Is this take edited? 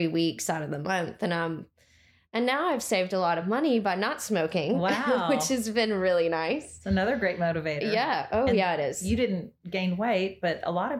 no; 0 cuts

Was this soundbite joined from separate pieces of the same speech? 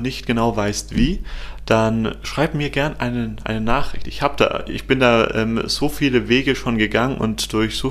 no; 0 cuts

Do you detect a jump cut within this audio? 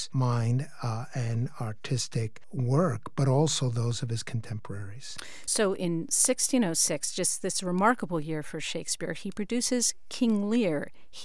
no; 0 cuts

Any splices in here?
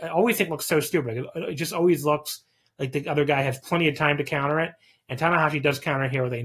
no; 0 cuts

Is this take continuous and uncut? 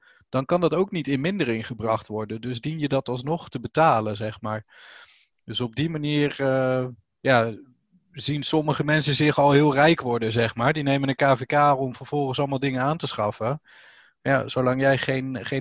yes; 0 cuts

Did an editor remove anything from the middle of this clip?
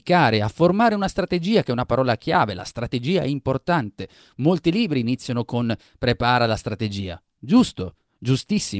no; 0 cuts

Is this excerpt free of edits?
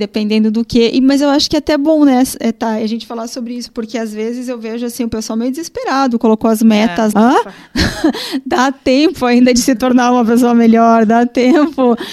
no; 1 cut; at 7.1 s

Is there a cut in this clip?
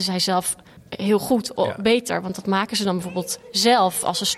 no; 0 cuts

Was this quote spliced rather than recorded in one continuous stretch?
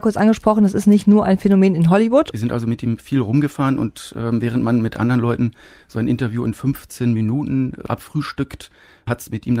yes; 1 cut; at 2.3 s

